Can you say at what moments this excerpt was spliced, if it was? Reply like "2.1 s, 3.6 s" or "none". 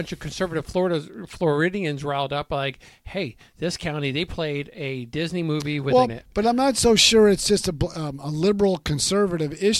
6.1 s